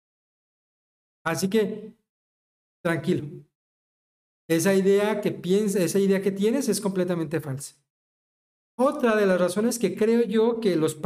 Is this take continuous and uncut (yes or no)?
yes